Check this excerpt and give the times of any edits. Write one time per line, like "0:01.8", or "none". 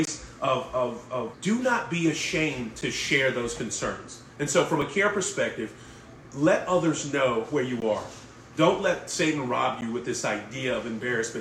0:01.3